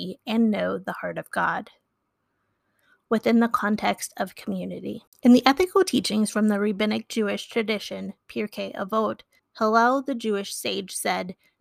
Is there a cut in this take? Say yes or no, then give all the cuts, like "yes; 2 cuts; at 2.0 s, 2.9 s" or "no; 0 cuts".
yes; 1 cut; at 9.4 s